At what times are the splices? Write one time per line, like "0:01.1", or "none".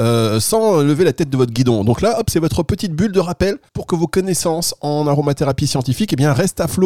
0:03.7